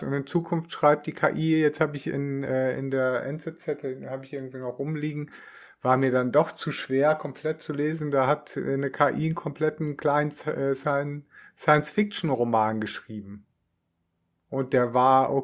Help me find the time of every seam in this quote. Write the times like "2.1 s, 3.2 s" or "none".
none